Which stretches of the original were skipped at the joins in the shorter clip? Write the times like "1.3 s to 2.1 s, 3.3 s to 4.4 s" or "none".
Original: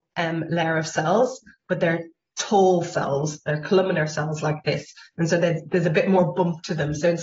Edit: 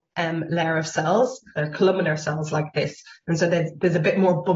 1.5 s to 3.4 s